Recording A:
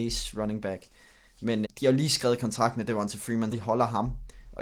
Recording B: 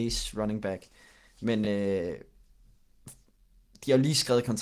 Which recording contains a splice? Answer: A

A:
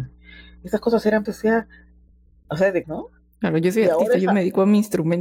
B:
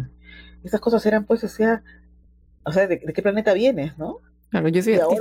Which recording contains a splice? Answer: A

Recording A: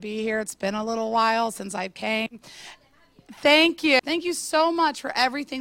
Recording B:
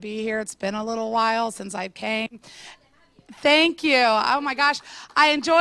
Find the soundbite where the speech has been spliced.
A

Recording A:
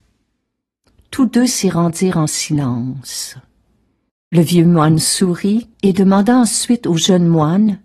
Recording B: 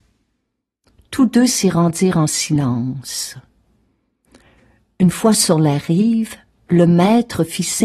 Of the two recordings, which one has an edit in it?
A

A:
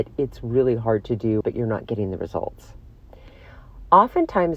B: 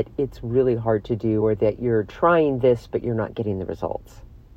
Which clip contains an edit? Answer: A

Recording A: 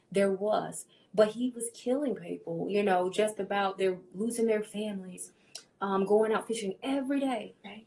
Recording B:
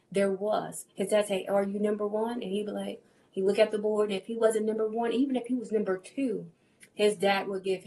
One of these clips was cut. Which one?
B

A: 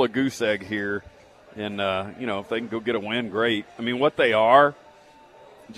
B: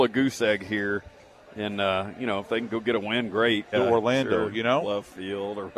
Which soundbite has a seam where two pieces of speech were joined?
B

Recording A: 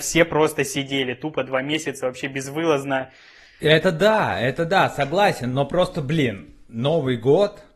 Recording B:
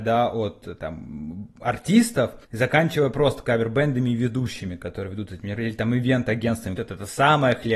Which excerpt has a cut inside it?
B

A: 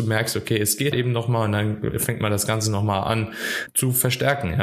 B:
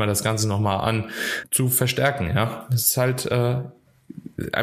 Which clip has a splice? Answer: A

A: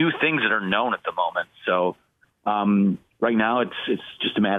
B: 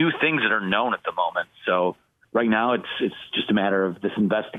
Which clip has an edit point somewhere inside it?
B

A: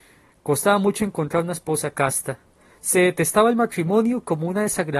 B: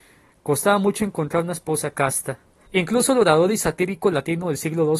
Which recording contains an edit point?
B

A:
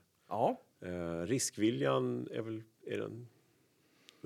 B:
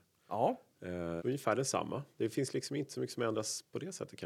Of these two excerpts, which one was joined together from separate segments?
B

